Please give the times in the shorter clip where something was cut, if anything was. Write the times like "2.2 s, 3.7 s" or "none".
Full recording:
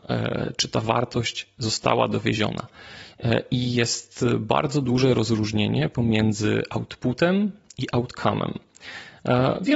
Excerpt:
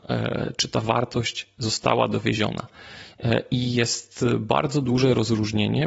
none